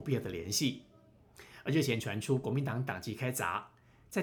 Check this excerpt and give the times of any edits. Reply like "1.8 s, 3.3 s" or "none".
none